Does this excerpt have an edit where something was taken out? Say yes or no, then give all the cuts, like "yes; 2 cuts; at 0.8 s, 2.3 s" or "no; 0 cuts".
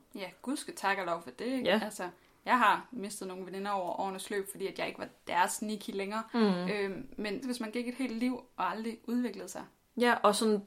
yes; 1 cut; at 7.4 s